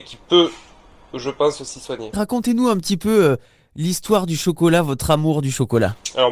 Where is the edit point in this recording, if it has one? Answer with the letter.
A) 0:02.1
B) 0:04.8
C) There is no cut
A